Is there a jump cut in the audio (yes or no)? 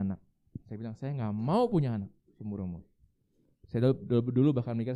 no